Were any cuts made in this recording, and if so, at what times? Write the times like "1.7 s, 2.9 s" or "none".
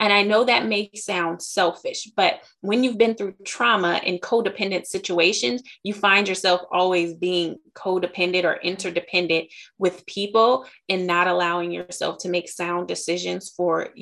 none

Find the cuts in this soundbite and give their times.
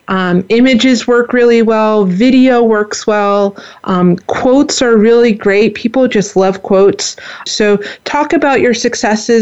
7.5 s

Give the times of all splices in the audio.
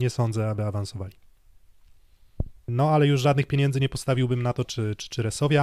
2.7 s, 4.6 s

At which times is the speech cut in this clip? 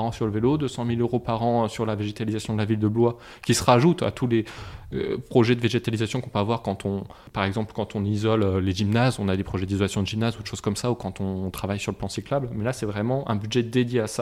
none

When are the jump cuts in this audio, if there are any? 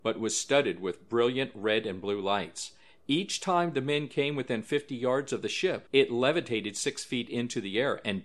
5.9 s

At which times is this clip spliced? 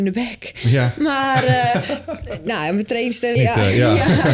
3.4 s

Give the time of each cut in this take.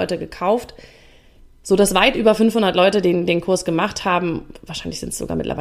none

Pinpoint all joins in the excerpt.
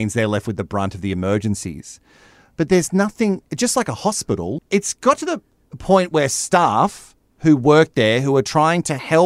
4.6 s

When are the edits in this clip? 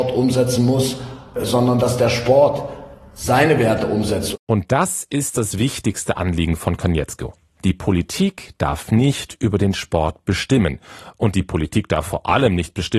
none

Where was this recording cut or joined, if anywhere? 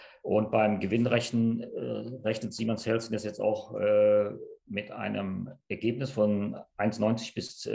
none

